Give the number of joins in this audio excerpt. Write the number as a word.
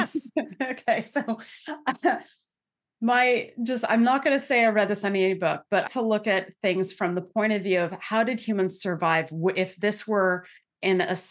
one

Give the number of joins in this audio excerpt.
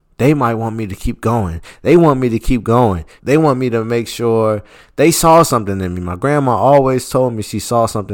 one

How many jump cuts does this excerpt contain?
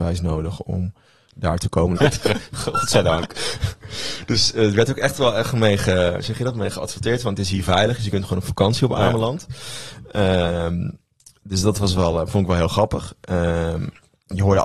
one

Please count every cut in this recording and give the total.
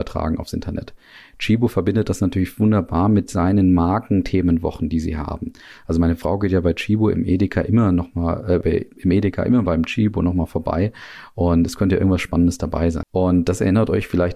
two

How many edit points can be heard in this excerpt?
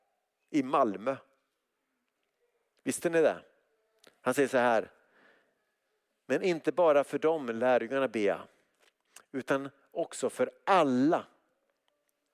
zero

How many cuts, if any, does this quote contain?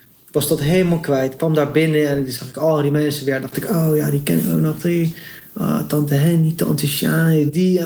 zero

